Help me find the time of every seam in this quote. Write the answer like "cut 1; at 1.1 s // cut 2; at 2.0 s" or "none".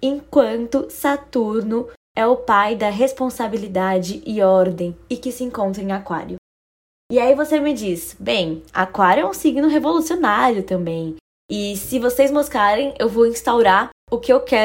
cut 1; at 11.3 s